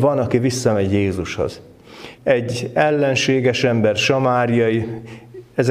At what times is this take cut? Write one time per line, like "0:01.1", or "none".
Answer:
0:02.2

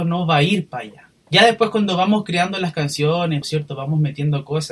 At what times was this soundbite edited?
0:01.3
0:03.4

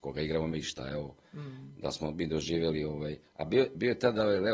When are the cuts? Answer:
none

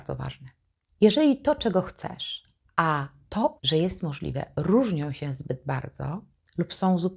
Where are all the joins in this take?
0:03.6

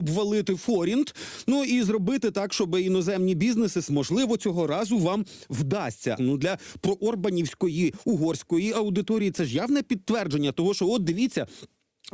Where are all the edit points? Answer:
0:03.9
0:06.2

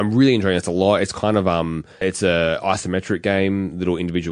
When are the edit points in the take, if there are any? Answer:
0:02.0

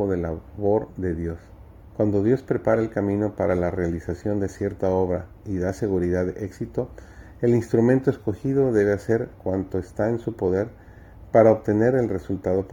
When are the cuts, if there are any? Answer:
0:01.9

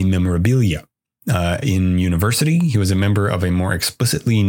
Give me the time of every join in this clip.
none

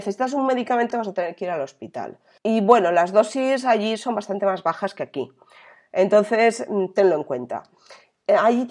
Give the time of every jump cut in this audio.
0:00.9

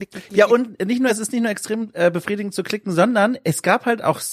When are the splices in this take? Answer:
none

